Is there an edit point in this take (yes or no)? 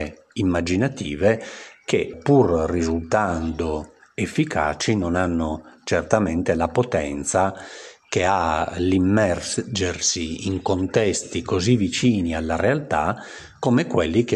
yes